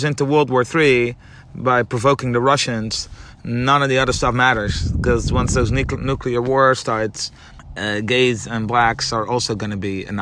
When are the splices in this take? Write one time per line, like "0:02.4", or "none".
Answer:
none